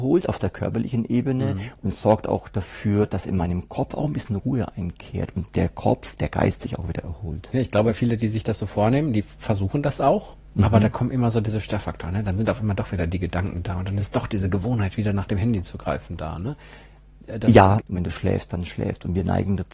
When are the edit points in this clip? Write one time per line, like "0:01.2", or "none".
0:07.5
0:17.8